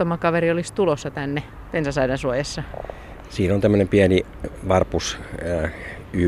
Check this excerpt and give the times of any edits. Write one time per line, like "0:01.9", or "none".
none